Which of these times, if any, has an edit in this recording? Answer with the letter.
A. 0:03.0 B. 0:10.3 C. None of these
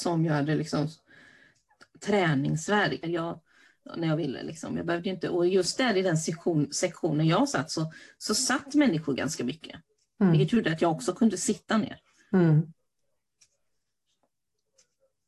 A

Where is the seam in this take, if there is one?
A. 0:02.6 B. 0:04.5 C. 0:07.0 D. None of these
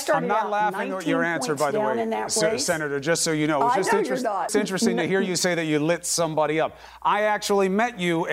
B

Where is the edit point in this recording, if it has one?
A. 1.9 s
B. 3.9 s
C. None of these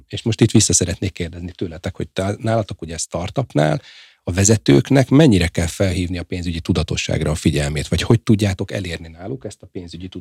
C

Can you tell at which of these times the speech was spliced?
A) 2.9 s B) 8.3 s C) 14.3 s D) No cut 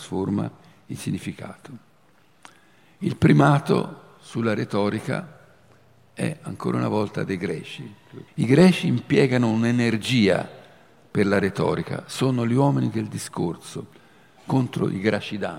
B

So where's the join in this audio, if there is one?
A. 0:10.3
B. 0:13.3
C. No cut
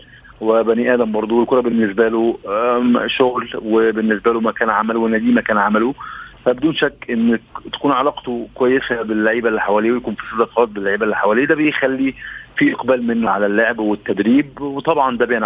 B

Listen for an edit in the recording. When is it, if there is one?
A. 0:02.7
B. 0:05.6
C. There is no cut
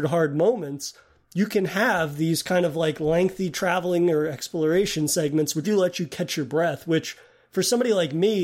B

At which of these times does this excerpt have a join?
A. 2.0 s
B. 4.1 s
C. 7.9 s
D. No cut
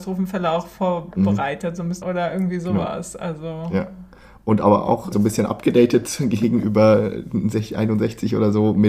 A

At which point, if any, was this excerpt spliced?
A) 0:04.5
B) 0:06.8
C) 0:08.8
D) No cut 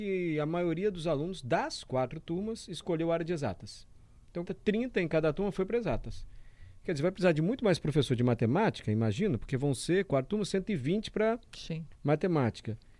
A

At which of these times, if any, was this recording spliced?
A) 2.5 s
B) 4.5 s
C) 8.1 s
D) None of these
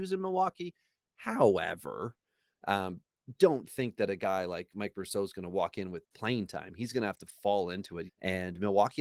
C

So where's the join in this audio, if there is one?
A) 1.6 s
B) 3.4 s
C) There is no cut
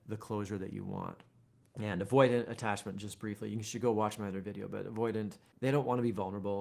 A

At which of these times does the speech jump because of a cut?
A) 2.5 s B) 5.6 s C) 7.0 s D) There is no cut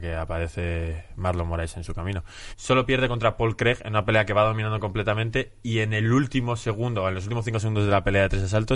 A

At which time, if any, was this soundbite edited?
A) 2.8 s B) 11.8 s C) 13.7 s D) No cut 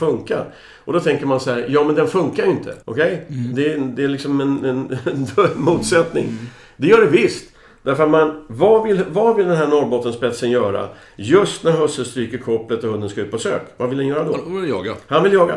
A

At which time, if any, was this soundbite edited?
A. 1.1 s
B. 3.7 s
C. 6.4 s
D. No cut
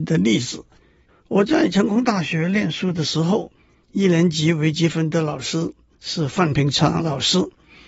A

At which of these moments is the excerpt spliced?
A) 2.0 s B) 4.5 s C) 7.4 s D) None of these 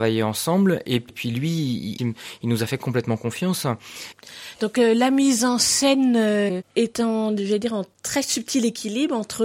A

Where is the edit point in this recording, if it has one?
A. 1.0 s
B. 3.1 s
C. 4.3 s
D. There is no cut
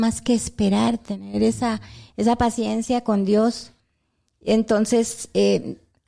D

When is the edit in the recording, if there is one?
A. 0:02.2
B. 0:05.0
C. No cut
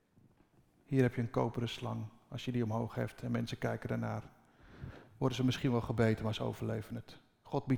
C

